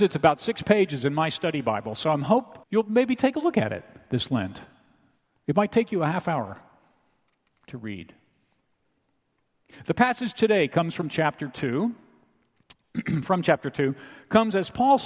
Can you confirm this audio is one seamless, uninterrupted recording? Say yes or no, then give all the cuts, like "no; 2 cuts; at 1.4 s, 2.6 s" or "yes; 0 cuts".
no; 1 cut; at 2.6 s